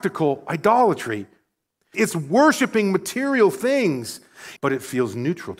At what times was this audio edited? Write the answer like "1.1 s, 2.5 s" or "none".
1.9 s, 4.6 s